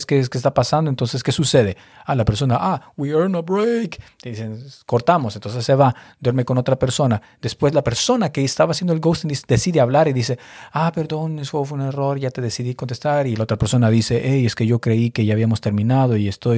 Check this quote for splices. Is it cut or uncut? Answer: uncut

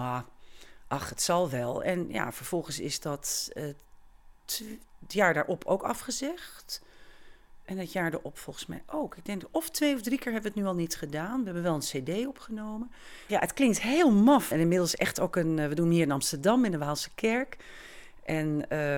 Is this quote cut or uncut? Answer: cut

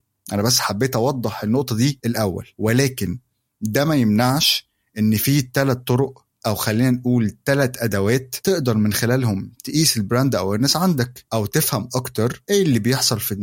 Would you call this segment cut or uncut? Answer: uncut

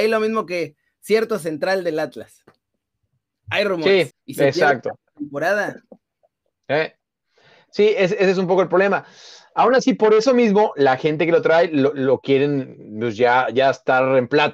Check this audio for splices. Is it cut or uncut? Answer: cut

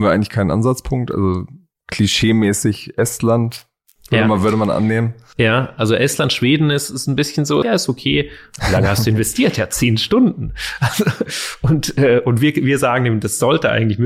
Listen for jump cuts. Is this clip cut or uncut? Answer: cut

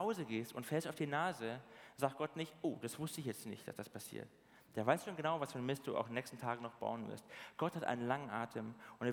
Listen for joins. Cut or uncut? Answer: uncut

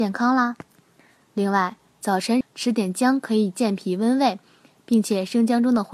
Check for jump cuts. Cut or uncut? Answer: cut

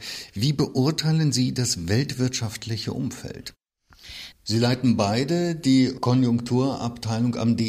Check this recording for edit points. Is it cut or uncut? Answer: cut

